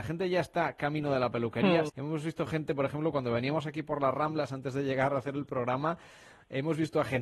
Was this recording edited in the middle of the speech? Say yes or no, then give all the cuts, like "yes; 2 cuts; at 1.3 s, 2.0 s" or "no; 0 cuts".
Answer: yes; 1 cut; at 1.9 s